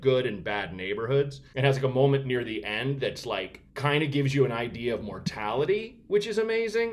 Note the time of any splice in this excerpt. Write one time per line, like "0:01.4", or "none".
0:01.5
0:03.7